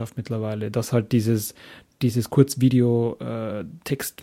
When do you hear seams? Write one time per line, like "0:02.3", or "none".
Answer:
none